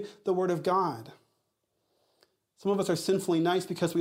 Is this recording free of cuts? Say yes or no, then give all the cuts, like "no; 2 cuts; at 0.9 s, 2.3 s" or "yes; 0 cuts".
yes; 0 cuts